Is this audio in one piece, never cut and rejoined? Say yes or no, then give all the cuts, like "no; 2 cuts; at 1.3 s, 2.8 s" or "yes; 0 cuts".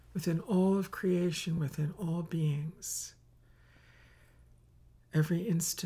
yes; 0 cuts